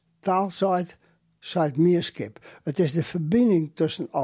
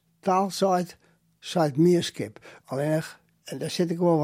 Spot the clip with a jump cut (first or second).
second